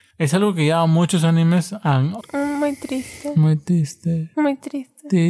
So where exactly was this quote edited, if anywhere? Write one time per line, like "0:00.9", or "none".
0:02.2